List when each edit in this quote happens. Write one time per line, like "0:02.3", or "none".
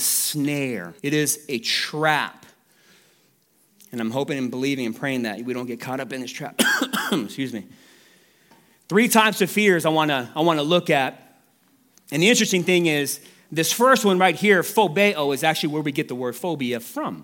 0:01.0